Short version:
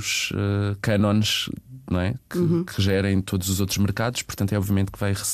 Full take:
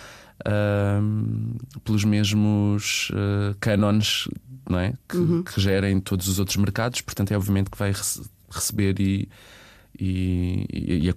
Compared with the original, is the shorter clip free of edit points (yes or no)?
yes